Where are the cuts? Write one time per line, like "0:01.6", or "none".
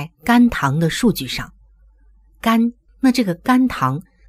0:02.9